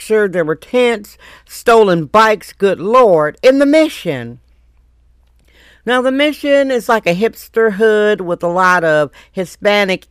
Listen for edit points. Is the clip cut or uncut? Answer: uncut